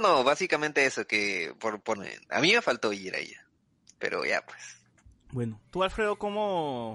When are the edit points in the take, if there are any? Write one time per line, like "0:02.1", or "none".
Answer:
0:01.9